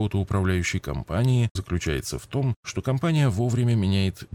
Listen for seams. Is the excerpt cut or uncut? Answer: cut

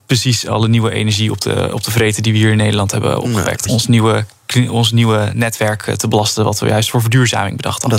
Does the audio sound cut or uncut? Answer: cut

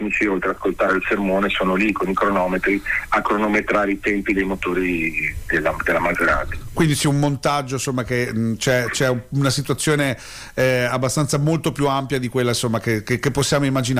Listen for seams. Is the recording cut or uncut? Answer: uncut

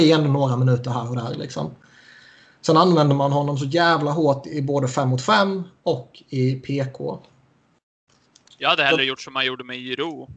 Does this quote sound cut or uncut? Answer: uncut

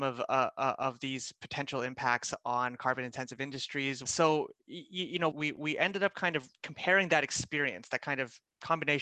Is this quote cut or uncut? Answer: cut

